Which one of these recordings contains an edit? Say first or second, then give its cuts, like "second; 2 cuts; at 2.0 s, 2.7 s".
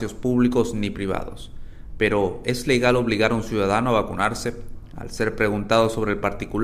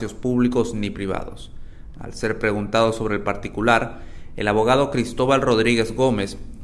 second; 1 cut; at 1.9 s